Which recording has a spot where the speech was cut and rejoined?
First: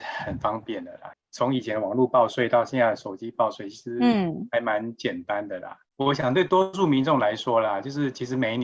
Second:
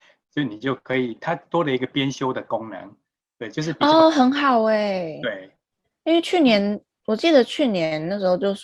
first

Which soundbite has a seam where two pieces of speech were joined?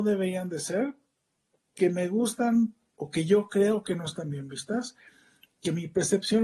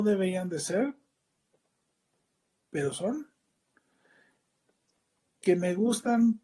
first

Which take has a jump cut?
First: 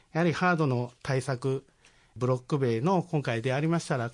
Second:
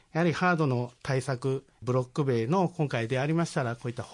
second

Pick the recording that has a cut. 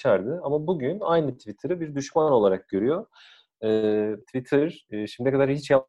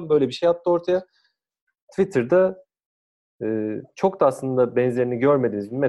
first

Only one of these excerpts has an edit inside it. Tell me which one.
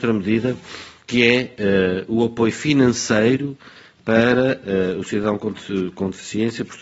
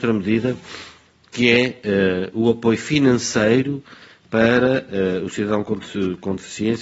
first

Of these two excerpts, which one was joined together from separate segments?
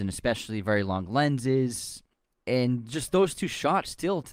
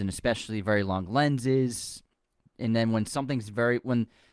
first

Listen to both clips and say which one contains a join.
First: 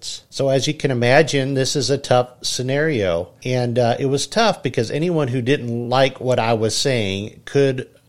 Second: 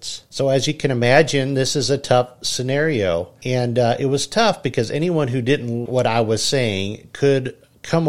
second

